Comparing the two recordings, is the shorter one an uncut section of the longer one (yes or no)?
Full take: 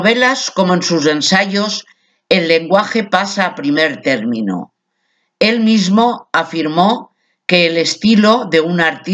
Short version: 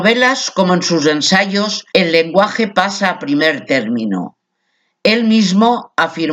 no